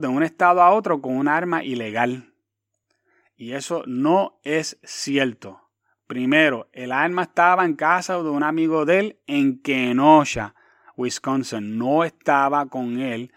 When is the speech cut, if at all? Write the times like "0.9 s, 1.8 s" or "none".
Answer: none